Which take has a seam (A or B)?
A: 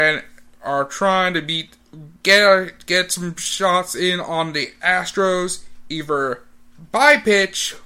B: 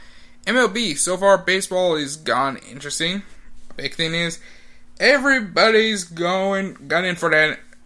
A